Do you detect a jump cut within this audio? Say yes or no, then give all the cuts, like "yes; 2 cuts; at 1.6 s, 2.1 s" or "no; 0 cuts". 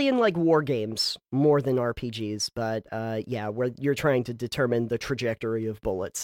no; 0 cuts